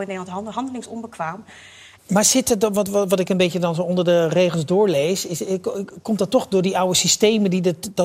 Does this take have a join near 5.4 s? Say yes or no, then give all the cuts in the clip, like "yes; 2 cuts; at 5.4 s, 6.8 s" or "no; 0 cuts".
no; 1 cut; at 2.0 s